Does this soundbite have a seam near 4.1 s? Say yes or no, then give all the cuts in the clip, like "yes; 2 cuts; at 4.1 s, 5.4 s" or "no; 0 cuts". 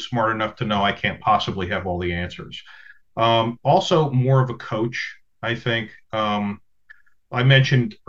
no; 0 cuts